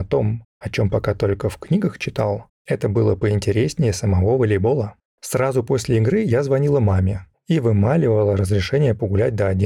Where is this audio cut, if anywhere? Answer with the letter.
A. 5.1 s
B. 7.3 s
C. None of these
B